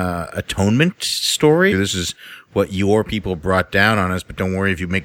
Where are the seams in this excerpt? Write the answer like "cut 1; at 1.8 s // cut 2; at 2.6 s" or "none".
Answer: cut 1; at 1.7 s